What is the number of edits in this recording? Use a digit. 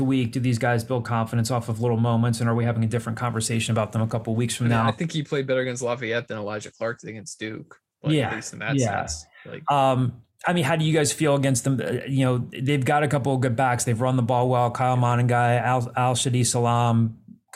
0